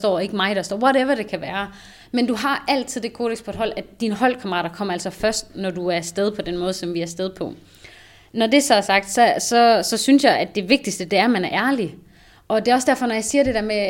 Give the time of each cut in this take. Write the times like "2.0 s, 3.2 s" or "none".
none